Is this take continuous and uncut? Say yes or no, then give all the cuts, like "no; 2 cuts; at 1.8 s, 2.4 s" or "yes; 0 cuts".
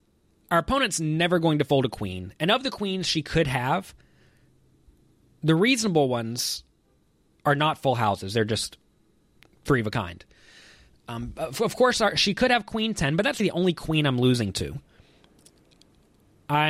no; 1 cut; at 13.4 s